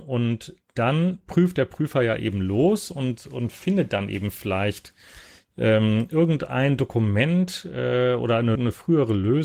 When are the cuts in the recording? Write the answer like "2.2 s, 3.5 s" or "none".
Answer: 8.5 s